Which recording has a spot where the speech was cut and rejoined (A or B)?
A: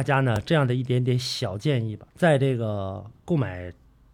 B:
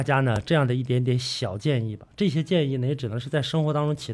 A